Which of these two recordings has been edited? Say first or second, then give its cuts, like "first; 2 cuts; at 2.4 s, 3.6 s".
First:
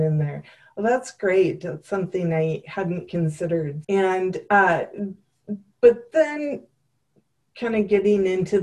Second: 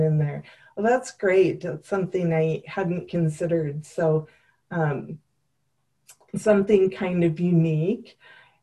first; 1 cut; at 3.8 s